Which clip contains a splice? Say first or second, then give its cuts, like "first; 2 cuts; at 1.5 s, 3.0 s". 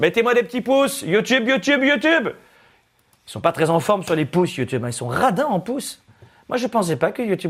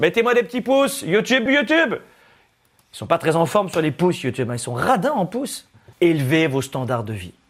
second; 2 cuts; at 1.5 s, 5.9 s